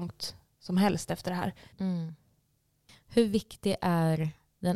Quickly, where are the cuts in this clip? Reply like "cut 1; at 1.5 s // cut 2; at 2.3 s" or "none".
cut 1; at 1.7 s

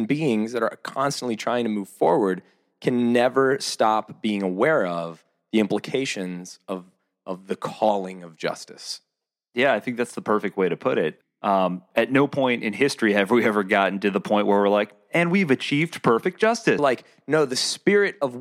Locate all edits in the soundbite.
cut 1; at 11.2 s // cut 2; at 16.8 s

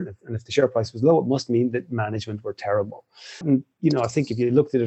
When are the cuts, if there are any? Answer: cut 1; at 3.4 s

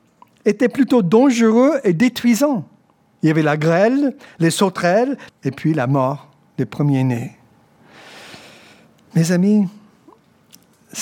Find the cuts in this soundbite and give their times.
cut 1; at 5.3 s

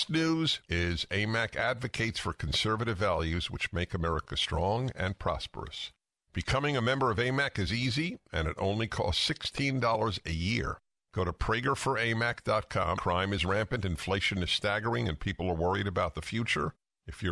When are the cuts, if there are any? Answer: cut 1; at 13.0 s

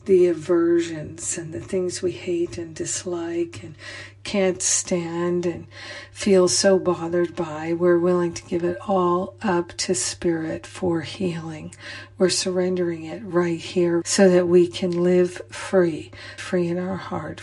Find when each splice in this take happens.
cut 1; at 14.0 s // cut 2; at 16.4 s

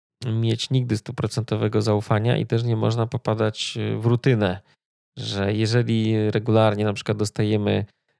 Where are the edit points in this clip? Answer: none

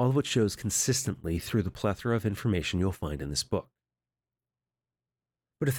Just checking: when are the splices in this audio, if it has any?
none

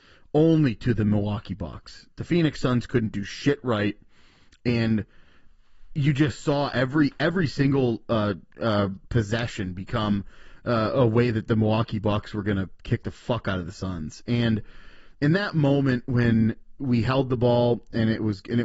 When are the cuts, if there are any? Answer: none

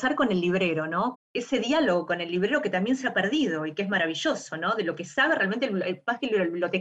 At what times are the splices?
cut 1; at 1.1 s

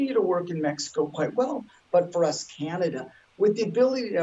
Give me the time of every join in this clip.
none

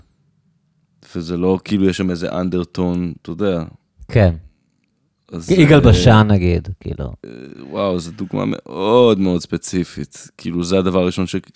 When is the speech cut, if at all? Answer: none

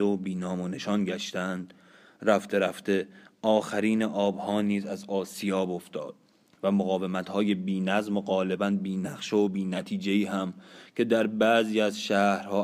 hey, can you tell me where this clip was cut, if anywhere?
none

